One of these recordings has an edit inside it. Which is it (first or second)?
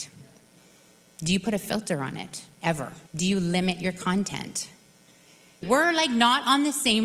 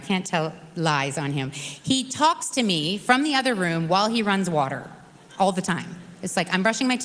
first